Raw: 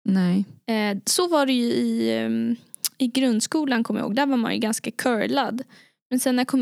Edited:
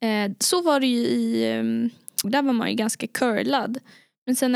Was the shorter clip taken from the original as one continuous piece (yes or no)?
no